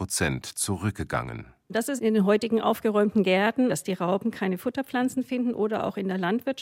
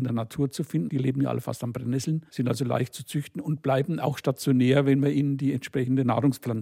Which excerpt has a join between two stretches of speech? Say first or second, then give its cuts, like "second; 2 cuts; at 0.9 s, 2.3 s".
second; 1 cut; at 2.3 s